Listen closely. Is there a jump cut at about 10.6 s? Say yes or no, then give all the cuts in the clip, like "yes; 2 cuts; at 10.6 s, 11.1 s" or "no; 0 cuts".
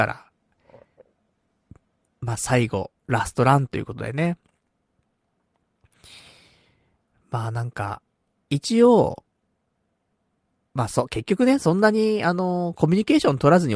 yes; 1 cut; at 10.6 s